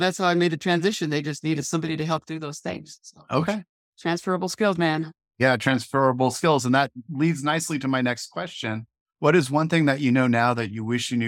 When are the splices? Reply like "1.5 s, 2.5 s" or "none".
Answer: none